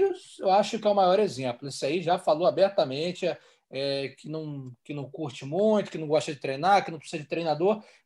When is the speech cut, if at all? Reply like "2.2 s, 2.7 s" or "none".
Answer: none